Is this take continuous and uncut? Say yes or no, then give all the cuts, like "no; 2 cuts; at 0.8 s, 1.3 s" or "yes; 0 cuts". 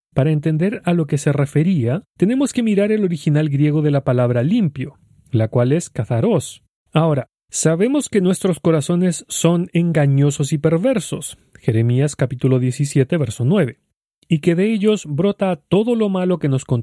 no; 1 cut; at 6.8 s